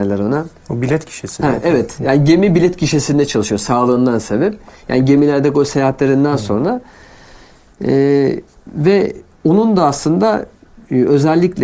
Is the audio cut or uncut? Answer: uncut